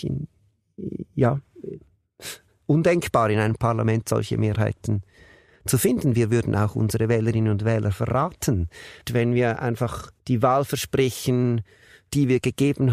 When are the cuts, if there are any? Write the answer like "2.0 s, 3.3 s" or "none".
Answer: 9.0 s, 10.2 s